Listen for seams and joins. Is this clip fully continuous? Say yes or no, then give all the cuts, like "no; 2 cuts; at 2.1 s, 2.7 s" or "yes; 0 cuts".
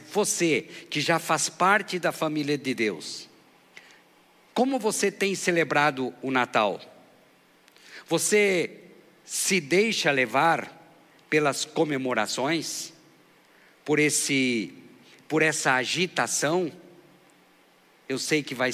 yes; 0 cuts